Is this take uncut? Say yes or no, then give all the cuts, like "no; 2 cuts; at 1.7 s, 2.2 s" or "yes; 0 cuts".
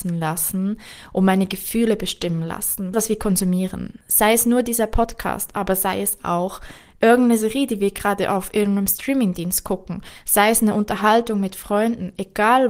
no; 1 cut; at 2.9 s